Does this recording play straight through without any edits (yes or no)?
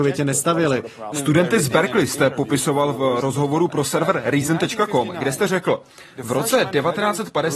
no